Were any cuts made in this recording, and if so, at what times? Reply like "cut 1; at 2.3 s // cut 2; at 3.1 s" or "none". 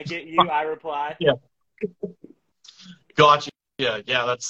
none